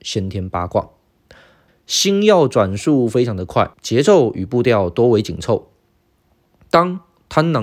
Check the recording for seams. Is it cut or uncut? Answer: cut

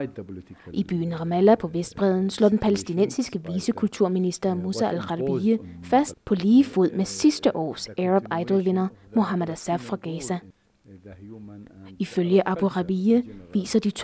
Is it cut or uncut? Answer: cut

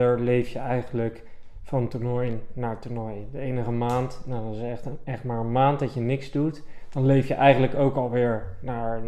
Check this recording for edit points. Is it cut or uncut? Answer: uncut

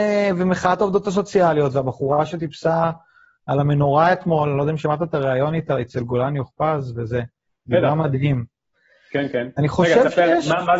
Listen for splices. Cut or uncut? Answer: uncut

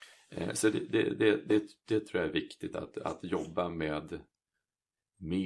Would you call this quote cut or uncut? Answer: uncut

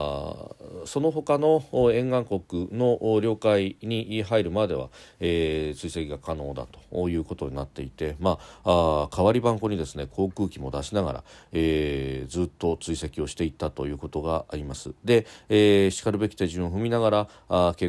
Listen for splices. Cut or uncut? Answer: uncut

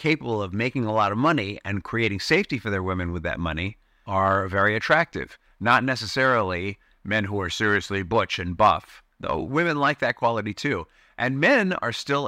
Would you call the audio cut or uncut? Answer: uncut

